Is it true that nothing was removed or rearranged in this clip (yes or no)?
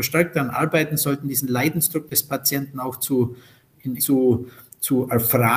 no